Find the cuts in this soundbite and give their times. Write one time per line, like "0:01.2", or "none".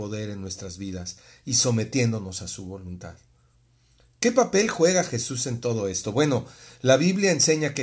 none

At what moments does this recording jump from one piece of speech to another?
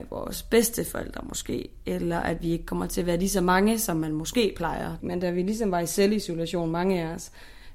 0:05.0

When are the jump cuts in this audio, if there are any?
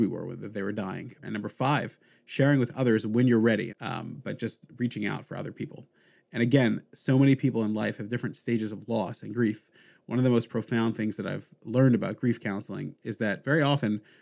0:01.2
0:03.7

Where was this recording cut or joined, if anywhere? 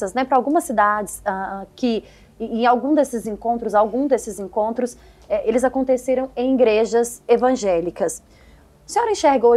none

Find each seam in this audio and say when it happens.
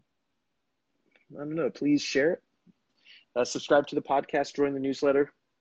none

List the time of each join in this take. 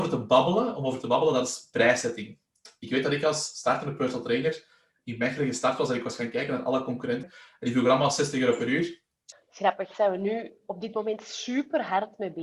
0:07.2
0:09.3

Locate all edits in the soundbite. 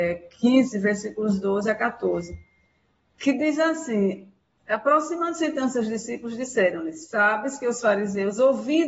none

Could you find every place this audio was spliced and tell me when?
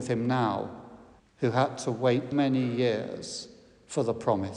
0:01.2
0:02.3

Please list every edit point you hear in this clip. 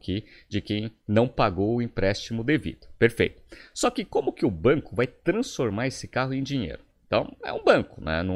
none

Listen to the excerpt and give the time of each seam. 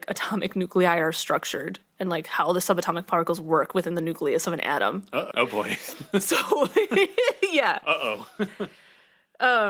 0:05.3

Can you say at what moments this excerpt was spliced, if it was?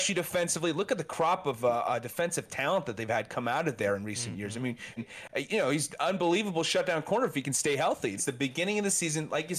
0:05.0
0:08.2

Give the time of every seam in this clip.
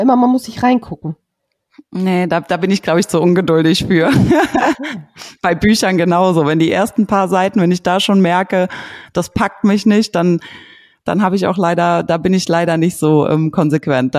none

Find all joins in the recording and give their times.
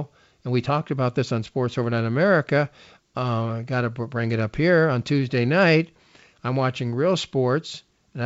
none

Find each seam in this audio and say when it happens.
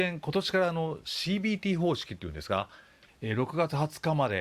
0:03.1

